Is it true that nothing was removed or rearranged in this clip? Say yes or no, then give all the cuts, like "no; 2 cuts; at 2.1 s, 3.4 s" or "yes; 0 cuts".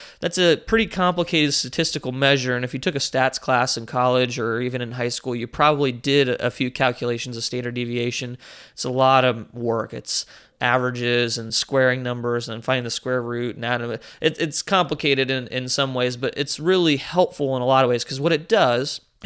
no; 1 cut; at 11.5 s